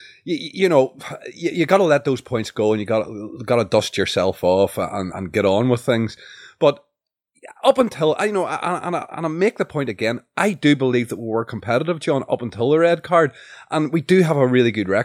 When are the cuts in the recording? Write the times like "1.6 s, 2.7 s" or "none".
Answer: 5.1 s